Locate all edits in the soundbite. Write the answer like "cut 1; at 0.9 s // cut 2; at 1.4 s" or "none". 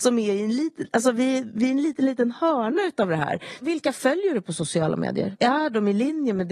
cut 1; at 3.6 s // cut 2; at 5.3 s